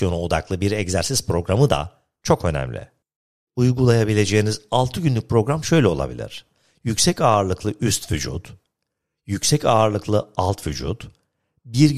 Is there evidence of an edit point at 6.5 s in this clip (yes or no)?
no